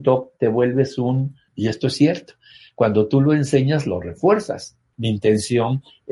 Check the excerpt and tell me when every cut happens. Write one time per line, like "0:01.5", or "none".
0:01.5
0:04.9